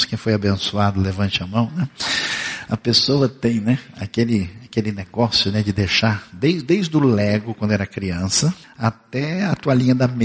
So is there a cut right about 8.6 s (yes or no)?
yes